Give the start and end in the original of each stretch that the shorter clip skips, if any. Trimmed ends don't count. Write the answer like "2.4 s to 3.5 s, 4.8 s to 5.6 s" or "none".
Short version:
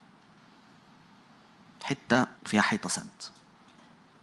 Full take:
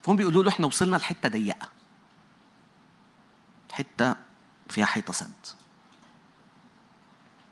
4.2 s to 4.6 s